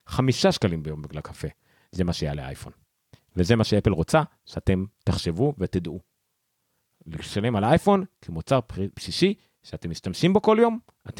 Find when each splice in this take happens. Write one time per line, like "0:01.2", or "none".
0:01.8